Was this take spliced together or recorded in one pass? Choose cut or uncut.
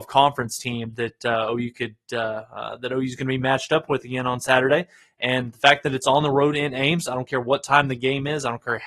uncut